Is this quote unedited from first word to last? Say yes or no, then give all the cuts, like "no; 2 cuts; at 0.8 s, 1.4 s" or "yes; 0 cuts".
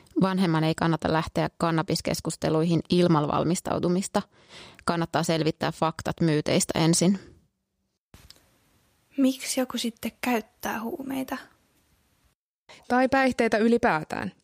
yes; 0 cuts